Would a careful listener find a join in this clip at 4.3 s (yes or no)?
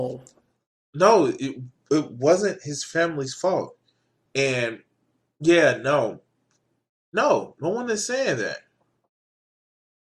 yes